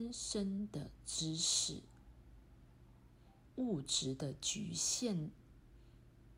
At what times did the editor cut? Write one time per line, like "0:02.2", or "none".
0:03.5

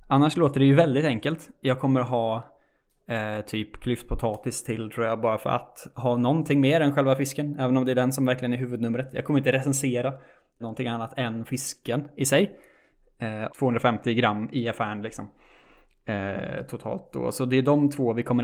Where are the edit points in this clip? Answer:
0:10.6
0:13.5

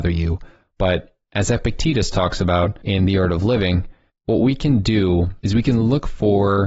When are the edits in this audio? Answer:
none

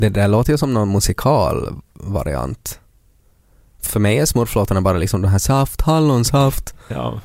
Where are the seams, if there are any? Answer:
0:03.9
0:05.8

